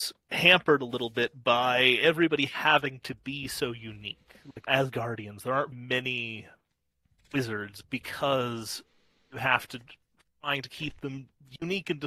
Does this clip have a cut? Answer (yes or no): yes